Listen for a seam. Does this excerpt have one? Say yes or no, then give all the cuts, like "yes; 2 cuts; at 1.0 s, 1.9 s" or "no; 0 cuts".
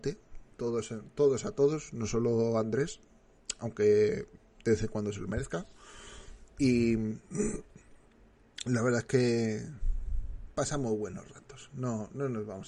no; 0 cuts